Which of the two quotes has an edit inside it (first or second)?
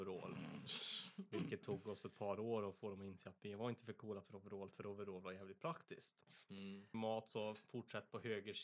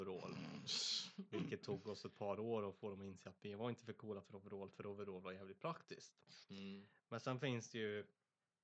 first